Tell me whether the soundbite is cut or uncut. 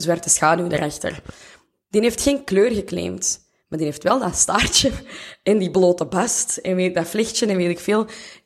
uncut